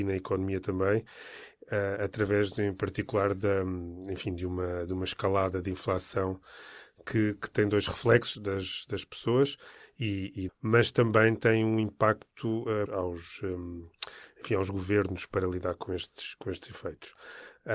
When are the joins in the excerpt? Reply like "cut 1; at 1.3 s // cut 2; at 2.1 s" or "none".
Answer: cut 1; at 8.3 s // cut 2; at 10.5 s // cut 3; at 12.9 s